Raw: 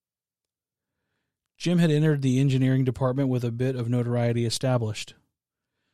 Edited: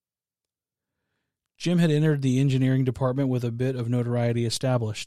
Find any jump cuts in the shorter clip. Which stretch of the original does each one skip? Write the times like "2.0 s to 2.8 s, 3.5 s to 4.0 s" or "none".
none

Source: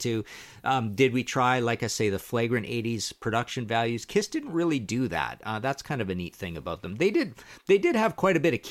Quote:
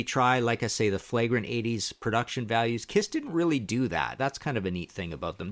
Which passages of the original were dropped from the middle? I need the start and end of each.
5.4 s to 5.6 s

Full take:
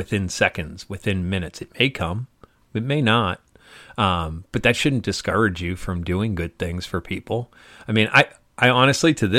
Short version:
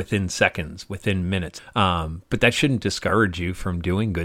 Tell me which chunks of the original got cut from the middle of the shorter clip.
1.6 s to 3.8 s

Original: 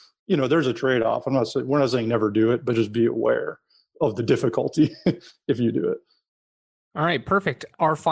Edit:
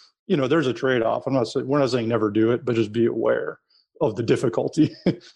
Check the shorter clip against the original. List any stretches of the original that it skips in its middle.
none

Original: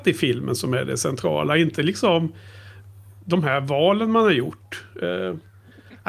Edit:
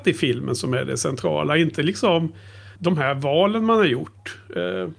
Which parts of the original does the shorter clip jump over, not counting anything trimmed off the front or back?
2.8 s to 3.2 s

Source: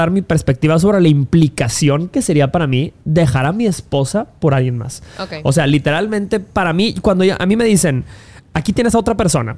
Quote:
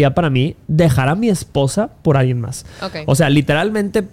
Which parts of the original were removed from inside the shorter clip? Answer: none

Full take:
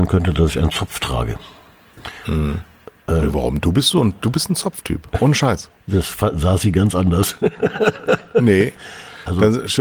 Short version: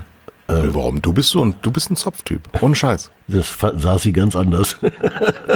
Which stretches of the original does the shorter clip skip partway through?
none

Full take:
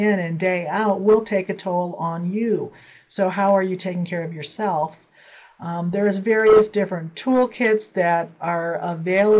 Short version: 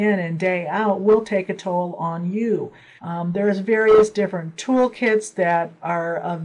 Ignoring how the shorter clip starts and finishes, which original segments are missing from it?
3.0 s to 5.6 s

